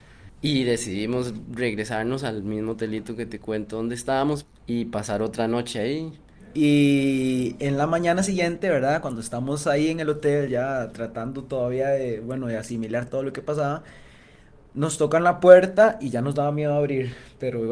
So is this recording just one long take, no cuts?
yes; 0 cuts

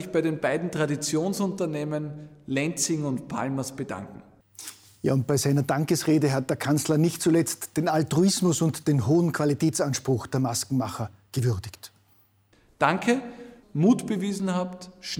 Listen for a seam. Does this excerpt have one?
yes; 1 cut; at 13.6 s

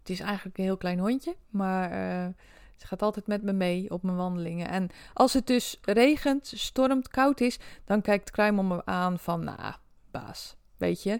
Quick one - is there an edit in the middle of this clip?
no; 0 cuts

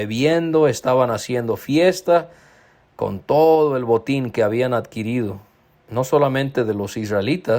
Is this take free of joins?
yes; 0 cuts

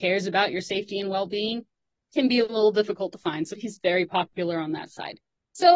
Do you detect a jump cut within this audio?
yes; 1 cut; at 3.5 s

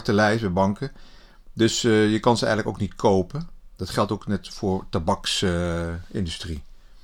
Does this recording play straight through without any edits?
yes; 0 cuts

